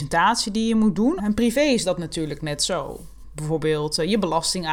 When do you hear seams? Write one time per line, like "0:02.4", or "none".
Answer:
0:01.2